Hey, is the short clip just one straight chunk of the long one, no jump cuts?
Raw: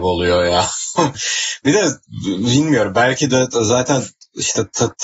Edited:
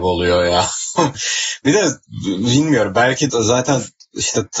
no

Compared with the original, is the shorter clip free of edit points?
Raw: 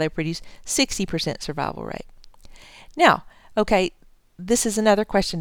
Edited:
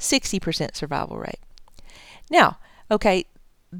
yes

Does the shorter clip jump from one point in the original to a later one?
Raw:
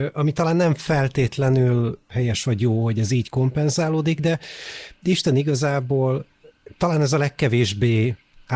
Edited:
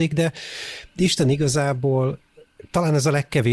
no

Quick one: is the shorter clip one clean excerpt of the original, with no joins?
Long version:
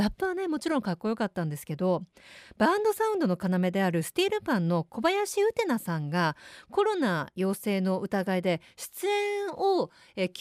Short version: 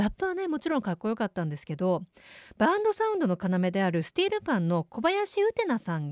yes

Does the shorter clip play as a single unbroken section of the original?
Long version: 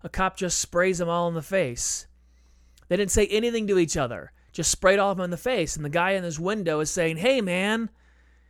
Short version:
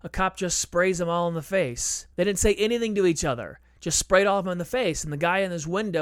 no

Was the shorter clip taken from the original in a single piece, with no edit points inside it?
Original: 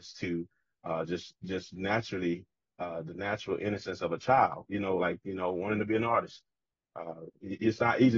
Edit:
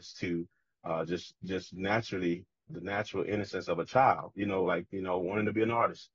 no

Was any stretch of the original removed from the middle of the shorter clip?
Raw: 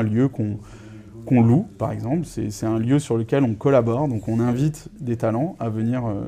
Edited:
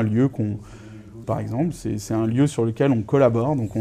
yes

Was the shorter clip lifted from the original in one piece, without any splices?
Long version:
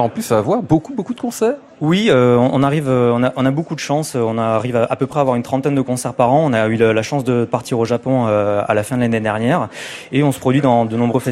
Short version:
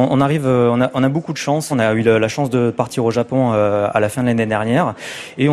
no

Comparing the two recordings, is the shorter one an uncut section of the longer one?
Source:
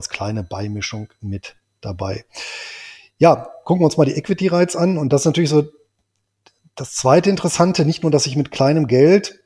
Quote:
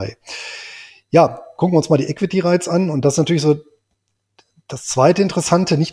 yes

